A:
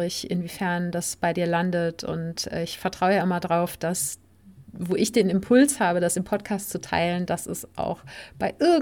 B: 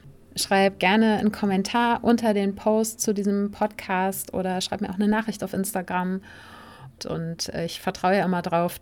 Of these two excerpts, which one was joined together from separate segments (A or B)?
B